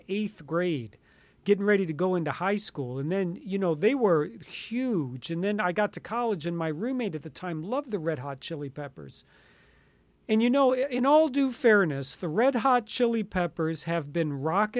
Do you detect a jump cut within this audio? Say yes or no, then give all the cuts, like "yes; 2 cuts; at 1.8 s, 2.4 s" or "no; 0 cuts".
no; 0 cuts